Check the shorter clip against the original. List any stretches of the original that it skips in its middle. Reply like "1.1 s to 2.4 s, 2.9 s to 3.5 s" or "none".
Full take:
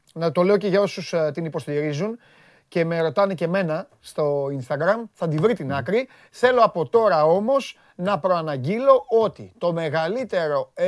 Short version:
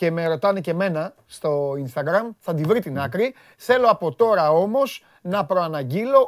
none